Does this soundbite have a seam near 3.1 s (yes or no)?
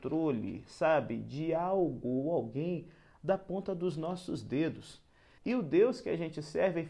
no